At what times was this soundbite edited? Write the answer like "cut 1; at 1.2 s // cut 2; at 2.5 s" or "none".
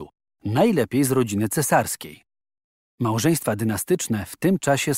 none